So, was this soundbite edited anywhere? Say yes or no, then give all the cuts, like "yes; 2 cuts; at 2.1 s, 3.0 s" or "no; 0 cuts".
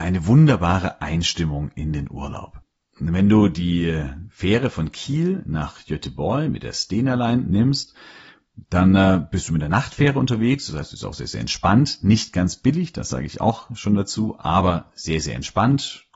no; 0 cuts